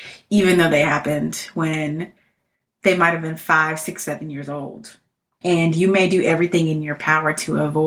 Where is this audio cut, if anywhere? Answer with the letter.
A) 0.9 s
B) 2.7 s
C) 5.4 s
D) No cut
C